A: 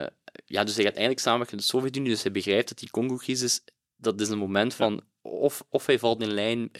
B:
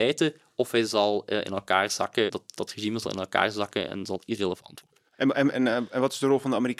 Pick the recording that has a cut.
B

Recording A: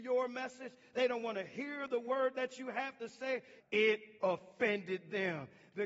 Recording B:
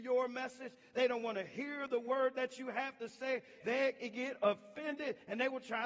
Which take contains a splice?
A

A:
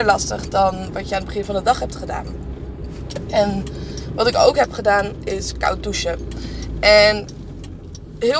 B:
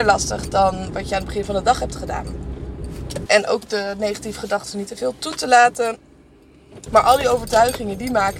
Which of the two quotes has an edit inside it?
B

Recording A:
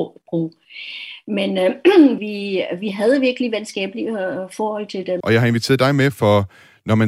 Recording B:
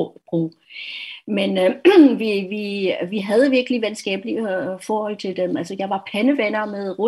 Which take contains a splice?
A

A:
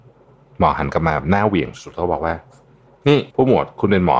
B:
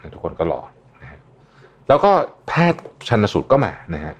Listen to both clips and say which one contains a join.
A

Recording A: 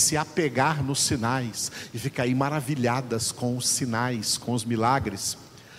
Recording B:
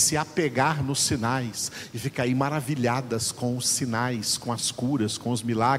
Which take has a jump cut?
A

